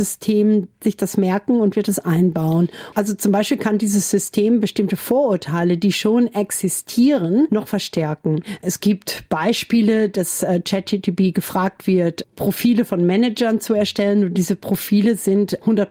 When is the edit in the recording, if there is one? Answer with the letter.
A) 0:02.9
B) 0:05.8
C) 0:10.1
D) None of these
A